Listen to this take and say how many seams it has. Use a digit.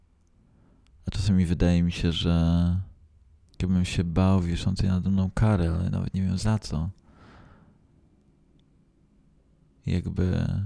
2